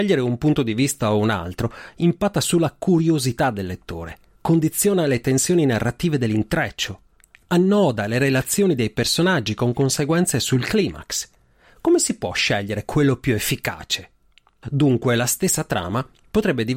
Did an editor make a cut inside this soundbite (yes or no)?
yes